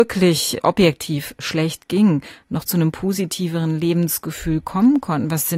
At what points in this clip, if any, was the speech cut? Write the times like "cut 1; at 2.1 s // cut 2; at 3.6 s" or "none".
none